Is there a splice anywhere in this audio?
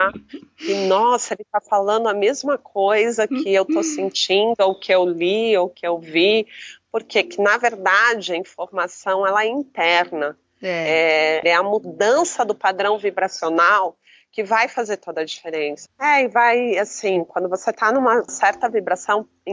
yes; 3 cuts; at 11.4 s, 15.9 s, 18.3 s

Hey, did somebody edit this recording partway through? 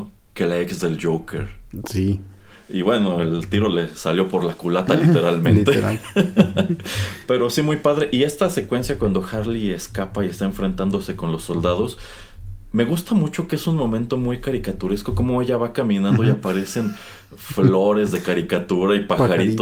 no; 0 cuts

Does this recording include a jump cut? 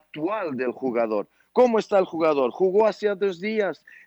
no; 0 cuts

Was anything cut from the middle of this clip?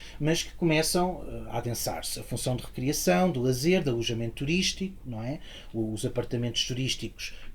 no; 0 cuts

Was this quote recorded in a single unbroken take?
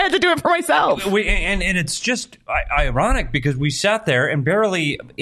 yes; 0 cuts

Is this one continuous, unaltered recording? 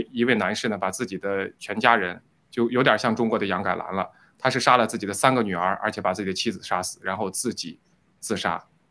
yes; 0 cuts

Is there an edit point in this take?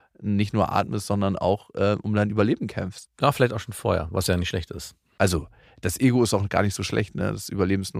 yes; 2 cuts; at 3.1 s, 5.2 s

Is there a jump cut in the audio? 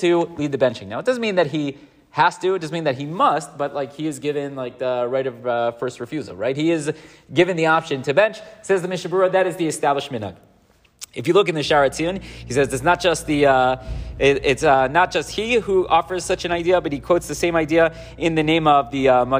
no; 0 cuts

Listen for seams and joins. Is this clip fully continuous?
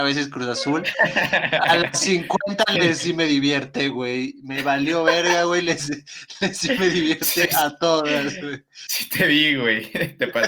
yes; 0 cuts

